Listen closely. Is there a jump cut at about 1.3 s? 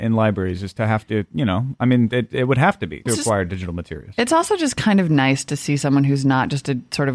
no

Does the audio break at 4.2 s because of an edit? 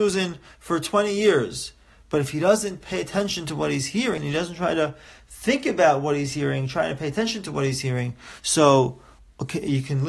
yes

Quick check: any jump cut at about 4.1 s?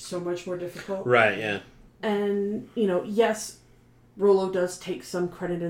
no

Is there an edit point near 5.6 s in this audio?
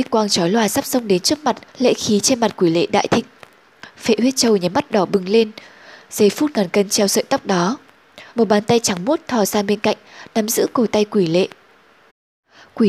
no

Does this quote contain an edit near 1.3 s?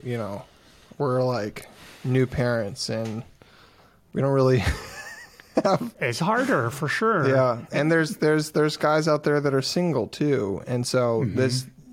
no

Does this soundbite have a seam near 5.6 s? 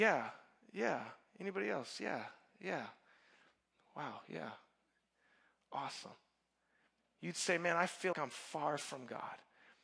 no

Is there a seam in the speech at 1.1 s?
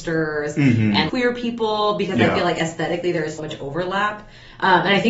yes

